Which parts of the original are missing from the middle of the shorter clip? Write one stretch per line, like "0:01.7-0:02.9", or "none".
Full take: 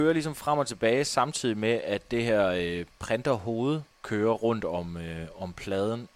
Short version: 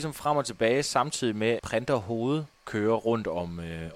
0:01.8-0:03.0